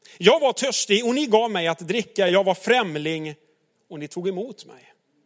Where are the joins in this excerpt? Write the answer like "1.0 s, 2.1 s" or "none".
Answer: none